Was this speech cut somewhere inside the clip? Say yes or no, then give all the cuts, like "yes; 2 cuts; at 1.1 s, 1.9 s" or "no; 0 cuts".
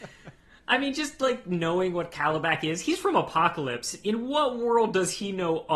no; 0 cuts